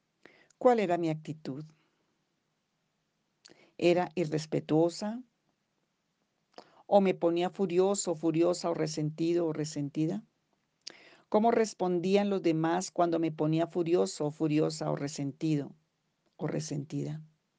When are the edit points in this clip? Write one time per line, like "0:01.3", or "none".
0:06.8